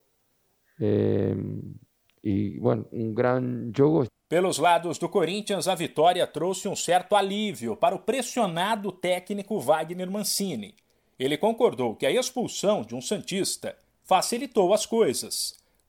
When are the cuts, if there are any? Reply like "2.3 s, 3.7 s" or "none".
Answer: 2.9 s